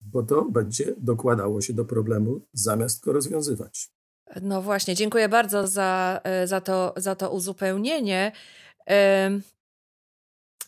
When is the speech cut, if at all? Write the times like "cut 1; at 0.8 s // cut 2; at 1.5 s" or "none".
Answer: none